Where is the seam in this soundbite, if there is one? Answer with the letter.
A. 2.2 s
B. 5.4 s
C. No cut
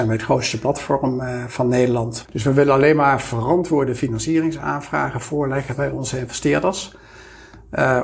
A